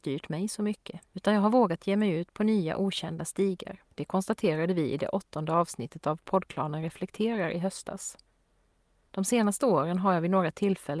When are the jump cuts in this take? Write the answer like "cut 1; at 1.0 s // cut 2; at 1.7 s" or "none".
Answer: cut 1; at 1.0 s // cut 2; at 3.9 s